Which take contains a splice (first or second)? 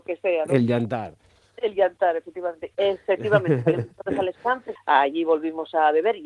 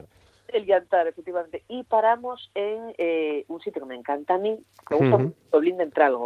first